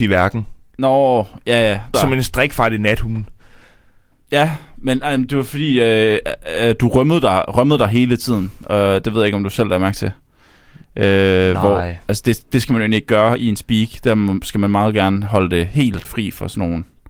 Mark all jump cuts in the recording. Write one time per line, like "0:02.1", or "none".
0:01.9
0:16.0